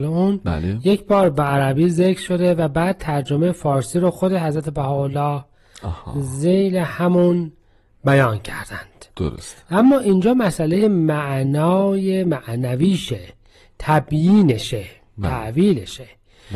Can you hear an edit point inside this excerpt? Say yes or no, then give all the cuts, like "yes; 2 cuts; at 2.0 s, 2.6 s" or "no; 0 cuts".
no; 0 cuts